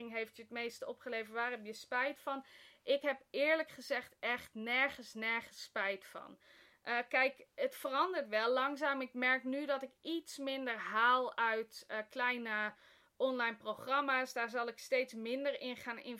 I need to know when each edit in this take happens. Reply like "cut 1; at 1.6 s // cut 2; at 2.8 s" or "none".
none